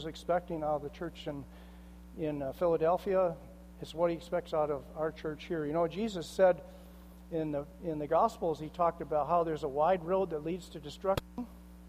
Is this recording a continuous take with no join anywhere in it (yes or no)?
yes